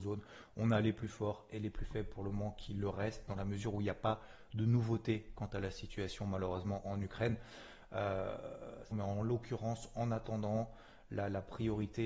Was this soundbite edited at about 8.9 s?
yes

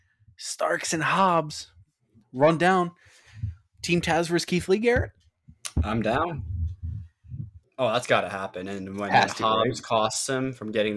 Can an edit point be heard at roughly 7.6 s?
yes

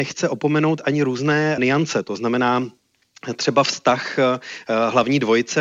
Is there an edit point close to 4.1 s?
no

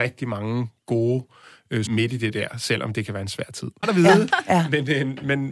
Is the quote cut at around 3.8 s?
yes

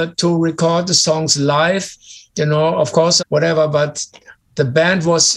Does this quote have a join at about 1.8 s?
no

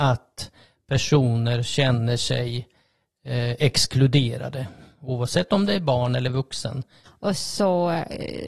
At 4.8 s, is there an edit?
no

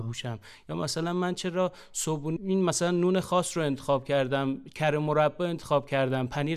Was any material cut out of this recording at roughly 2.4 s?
yes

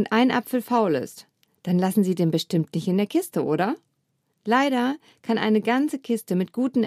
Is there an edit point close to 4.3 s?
yes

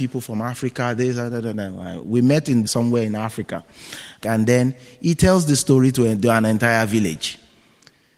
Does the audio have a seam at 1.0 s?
no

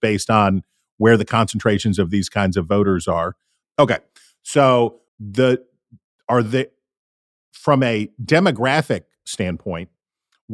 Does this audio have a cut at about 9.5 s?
no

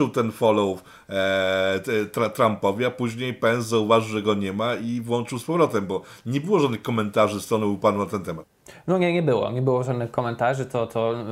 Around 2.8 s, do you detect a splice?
no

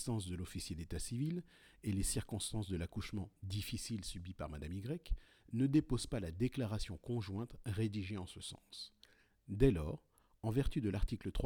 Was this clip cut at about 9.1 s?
no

